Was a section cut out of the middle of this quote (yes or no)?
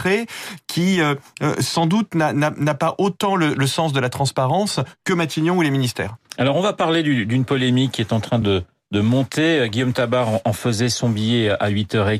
no